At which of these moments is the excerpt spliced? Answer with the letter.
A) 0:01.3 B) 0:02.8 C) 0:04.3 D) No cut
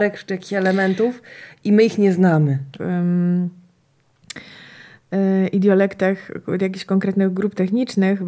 B